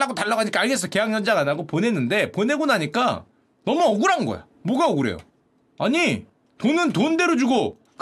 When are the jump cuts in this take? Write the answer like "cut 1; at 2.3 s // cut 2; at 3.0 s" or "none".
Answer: cut 1; at 4.5 s